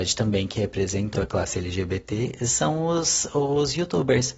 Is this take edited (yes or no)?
yes